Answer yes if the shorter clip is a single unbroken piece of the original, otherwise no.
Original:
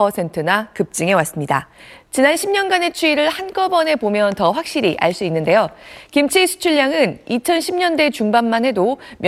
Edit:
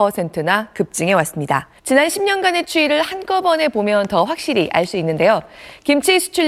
no